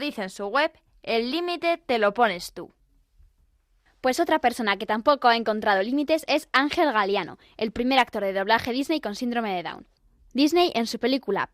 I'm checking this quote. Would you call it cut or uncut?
uncut